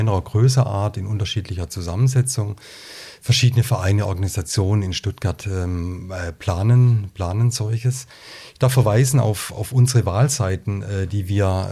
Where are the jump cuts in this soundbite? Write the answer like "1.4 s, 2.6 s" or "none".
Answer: none